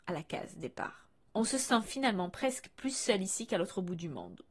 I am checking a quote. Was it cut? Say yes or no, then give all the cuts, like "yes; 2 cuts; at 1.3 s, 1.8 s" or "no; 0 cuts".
no; 0 cuts